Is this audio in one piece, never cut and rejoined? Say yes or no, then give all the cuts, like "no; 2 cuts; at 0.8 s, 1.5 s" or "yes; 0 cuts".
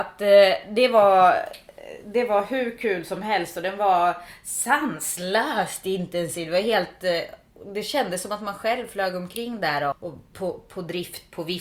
no; 1 cut; at 9.9 s